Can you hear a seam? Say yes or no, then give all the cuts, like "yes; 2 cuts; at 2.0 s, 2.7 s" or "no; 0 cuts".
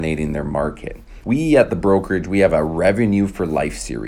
yes; 1 cut; at 1.2 s